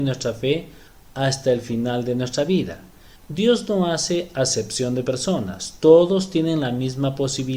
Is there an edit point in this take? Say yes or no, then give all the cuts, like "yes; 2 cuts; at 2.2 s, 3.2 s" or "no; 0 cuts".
yes; 1 cut; at 3.1 s